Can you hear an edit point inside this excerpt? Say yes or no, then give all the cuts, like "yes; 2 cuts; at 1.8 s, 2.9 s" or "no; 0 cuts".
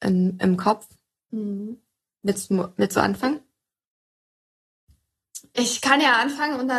no; 0 cuts